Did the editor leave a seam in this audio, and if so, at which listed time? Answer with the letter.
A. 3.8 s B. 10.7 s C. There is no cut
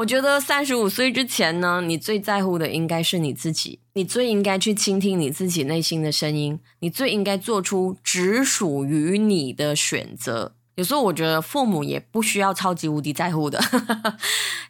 B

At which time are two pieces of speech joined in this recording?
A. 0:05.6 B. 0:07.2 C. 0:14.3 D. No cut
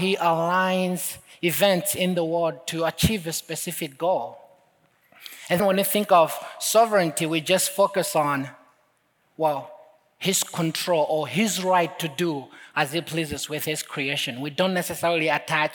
A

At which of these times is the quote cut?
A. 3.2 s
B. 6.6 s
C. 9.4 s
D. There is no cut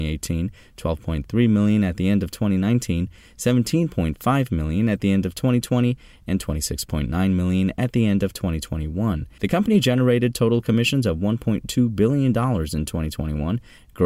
C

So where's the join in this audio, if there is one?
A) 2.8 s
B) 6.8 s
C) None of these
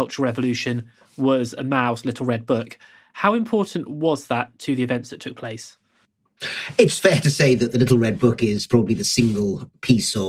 C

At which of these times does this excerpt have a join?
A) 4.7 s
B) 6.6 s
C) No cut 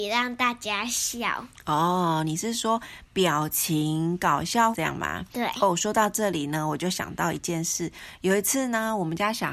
A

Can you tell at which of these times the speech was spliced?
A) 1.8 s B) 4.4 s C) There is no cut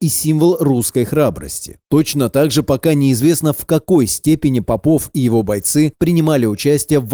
A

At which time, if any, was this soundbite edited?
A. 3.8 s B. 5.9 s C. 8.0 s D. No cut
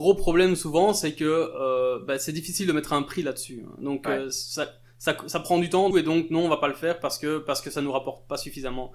B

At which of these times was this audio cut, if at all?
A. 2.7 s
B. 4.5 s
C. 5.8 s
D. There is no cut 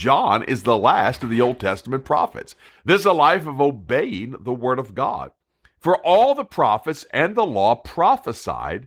A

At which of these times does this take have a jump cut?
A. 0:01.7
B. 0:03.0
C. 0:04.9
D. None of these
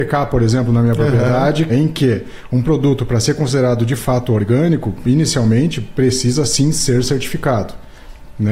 A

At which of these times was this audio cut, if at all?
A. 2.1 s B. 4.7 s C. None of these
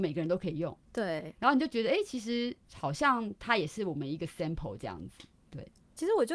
C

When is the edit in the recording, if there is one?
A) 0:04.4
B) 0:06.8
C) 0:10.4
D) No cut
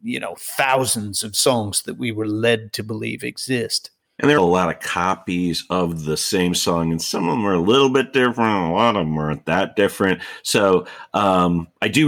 A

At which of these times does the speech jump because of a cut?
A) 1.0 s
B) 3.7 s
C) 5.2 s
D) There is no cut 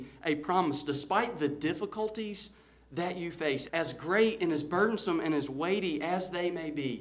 B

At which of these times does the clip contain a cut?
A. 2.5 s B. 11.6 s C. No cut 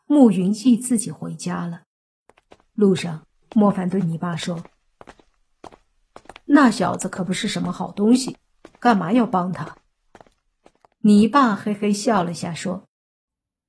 C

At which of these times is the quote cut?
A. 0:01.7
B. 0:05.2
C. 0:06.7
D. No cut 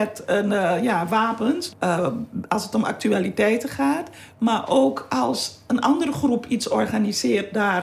A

